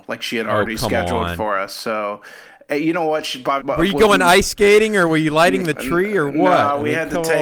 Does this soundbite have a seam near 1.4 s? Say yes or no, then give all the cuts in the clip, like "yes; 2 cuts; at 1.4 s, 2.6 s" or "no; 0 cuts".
no; 1 cut; at 3.6 s